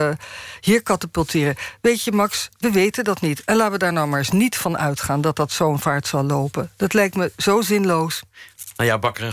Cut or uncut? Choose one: uncut